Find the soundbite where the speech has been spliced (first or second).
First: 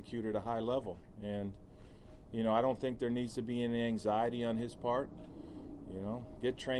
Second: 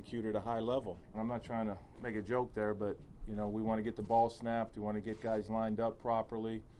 second